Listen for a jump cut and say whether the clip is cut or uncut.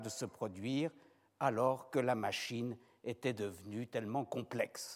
uncut